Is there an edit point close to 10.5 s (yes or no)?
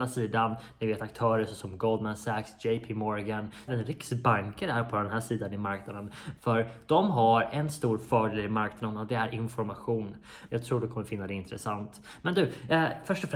yes